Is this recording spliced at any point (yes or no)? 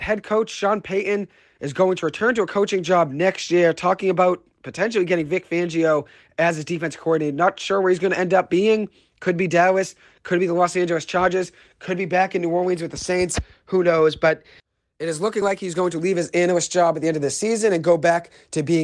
no